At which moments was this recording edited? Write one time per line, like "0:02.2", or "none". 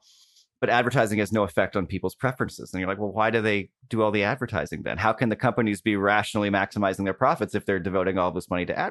none